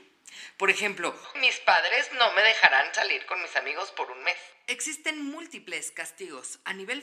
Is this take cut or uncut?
cut